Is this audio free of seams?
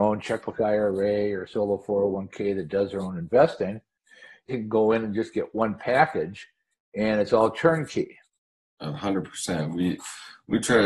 no; 1 cut; at 4.5 s

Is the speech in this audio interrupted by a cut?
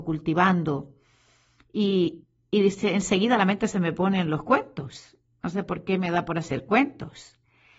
no; 0 cuts

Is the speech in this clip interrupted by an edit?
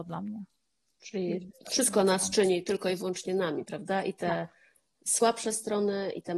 no; 0 cuts

